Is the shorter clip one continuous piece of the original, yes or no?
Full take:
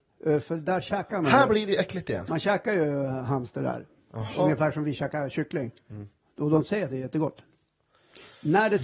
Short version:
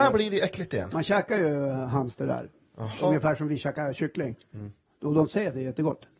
yes